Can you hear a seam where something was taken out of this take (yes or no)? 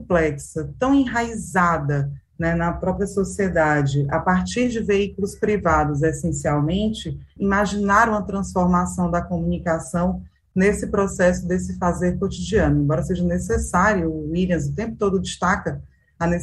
yes